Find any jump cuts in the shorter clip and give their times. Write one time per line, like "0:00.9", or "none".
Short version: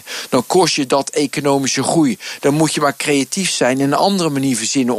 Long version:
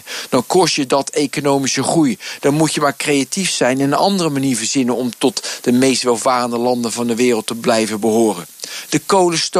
none